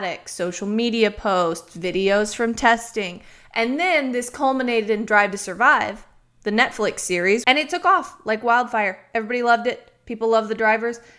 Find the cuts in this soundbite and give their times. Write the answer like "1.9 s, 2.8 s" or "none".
7.4 s